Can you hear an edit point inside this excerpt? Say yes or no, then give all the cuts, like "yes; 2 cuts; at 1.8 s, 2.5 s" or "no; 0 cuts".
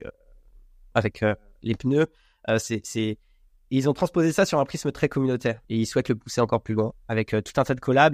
yes; 2 cuts; at 0.9 s, 5.6 s